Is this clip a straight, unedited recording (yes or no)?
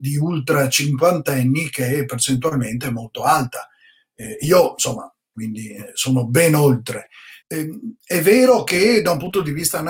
no